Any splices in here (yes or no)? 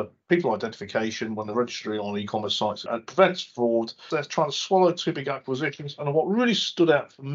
yes